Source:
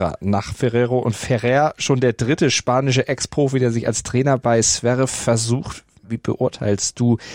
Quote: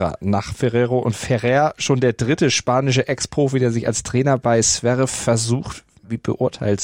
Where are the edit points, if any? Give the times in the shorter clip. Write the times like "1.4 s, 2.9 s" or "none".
none